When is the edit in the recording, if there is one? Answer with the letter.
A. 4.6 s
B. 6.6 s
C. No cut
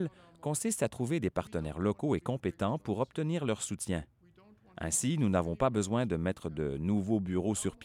C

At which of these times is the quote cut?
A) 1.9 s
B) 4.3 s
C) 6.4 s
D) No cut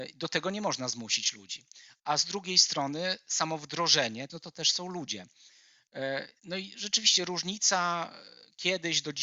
B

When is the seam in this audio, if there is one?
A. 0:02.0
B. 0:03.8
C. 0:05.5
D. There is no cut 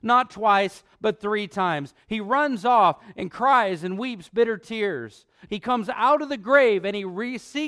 C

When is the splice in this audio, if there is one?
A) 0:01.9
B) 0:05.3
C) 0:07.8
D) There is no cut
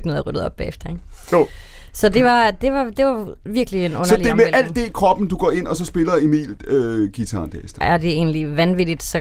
C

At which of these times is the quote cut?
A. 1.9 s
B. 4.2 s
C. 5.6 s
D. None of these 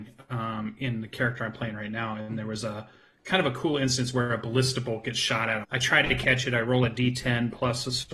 C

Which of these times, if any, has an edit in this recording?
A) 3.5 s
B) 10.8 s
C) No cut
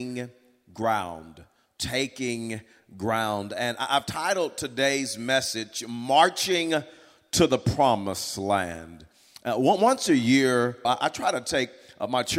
B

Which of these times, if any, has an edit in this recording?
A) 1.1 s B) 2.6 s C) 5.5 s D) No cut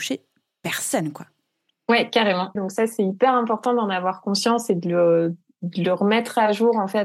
B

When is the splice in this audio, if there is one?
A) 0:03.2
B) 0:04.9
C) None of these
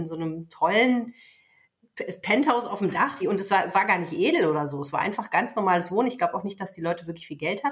A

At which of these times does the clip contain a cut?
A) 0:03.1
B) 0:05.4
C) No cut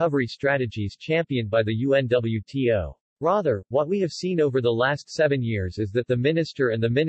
A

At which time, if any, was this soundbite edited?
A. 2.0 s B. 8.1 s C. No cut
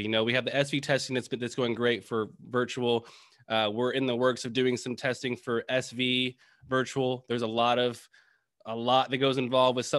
A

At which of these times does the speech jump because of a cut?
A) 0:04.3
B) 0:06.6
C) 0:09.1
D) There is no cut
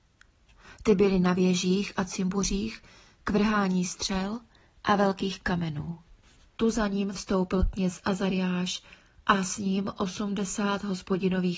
B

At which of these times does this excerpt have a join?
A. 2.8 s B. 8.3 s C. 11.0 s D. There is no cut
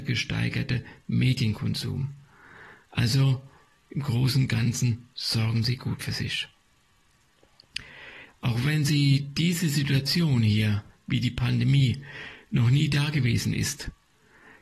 B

